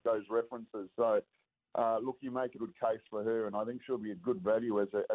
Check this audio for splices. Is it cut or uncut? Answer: cut